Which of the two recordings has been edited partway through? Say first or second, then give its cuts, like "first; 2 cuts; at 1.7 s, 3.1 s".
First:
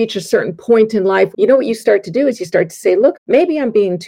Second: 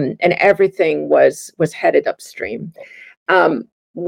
first; 2 cuts; at 1.3 s, 3.1 s